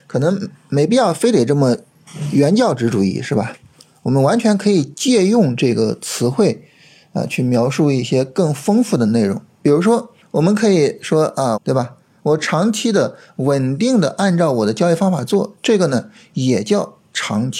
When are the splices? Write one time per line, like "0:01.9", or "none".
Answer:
0:11.5